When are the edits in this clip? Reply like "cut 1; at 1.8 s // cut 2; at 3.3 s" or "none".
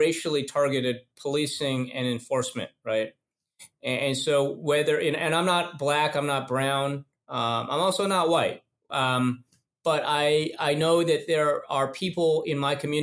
none